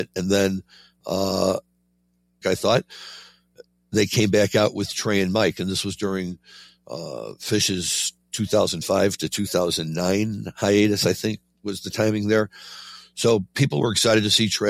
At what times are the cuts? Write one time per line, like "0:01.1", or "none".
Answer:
0:02.4